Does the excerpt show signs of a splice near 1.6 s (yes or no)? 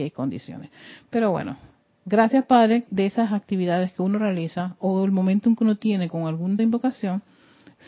no